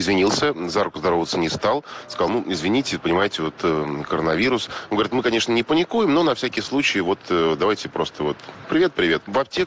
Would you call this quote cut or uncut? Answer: uncut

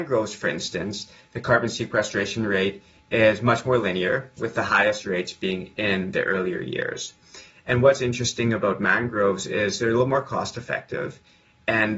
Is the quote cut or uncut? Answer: uncut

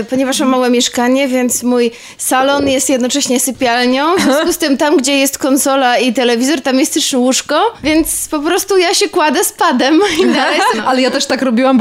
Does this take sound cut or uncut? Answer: cut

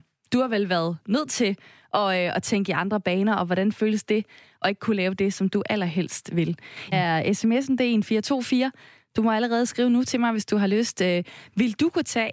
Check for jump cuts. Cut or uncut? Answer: cut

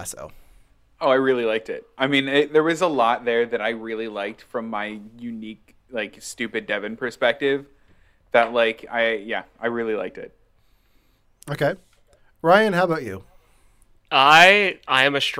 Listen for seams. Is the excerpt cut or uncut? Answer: uncut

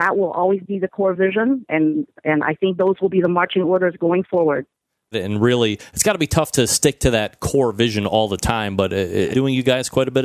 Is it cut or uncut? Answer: cut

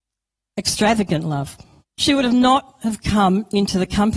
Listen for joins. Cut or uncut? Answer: cut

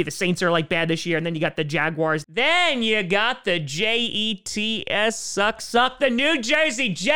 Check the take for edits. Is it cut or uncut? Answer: cut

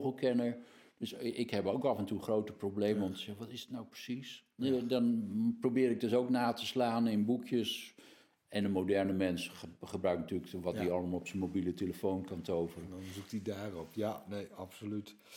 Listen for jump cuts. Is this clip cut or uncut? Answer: uncut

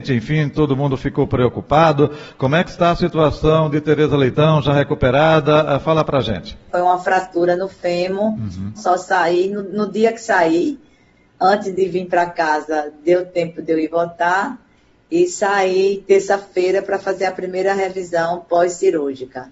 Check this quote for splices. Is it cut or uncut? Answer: cut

